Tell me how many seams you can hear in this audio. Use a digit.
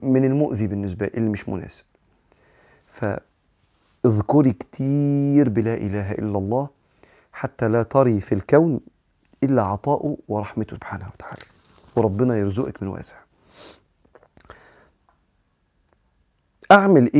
0